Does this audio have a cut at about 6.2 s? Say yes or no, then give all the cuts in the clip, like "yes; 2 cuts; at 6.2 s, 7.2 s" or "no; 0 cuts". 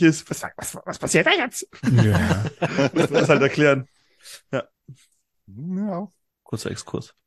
no; 0 cuts